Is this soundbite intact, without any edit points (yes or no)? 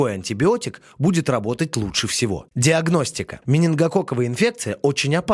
no